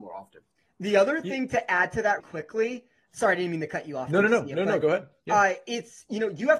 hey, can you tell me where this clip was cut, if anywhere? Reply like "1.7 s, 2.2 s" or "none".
2.2 s